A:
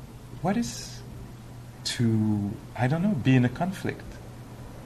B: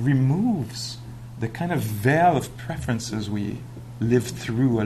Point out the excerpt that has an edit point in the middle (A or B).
A